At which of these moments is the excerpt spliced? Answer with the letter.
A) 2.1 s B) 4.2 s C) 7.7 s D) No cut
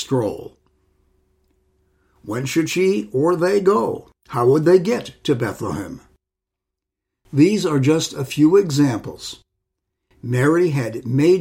B